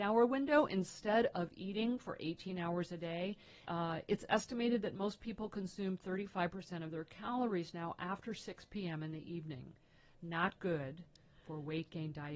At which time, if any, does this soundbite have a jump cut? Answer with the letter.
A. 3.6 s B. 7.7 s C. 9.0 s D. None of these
A